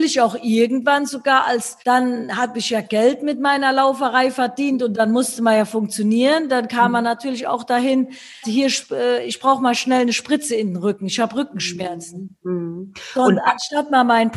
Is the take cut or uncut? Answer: cut